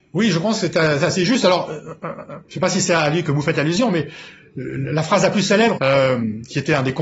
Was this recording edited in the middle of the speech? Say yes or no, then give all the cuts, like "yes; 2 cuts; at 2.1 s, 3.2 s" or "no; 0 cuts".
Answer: yes; 1 cut; at 5.8 s